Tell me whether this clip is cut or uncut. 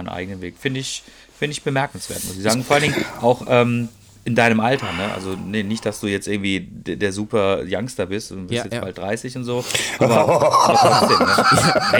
uncut